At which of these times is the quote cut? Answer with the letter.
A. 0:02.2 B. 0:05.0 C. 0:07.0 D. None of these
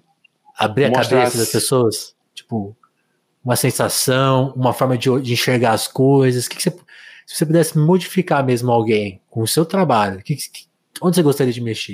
A